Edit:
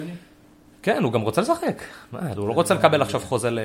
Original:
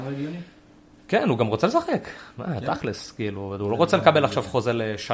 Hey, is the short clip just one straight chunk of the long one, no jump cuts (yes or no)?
no